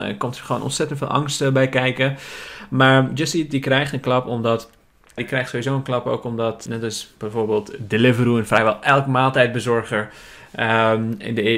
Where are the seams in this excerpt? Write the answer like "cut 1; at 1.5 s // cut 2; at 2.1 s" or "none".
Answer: cut 1; at 5.2 s // cut 2; at 6.7 s